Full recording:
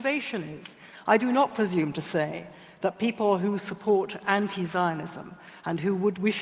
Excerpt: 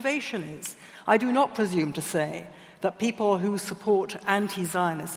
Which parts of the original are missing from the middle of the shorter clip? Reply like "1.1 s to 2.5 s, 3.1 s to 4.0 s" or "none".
none